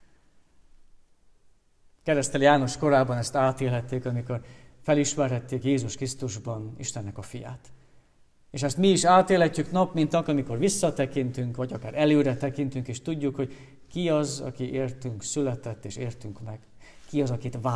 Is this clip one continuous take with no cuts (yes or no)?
no